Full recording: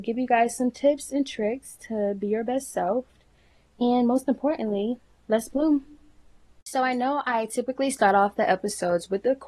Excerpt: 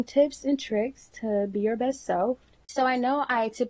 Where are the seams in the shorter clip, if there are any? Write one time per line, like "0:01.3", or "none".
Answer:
0:02.6